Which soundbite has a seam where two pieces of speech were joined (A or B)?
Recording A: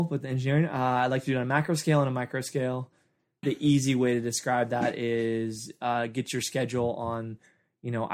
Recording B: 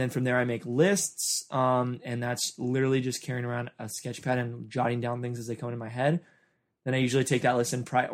A